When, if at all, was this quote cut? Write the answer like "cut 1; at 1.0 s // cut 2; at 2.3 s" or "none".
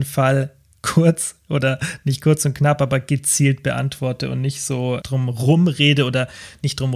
cut 1; at 5.0 s